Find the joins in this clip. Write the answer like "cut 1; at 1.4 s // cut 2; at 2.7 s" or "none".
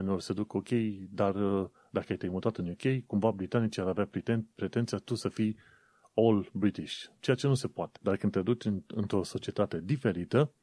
cut 1; at 8.0 s